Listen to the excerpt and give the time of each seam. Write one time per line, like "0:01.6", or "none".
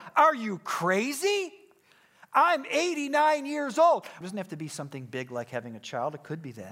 0:04.2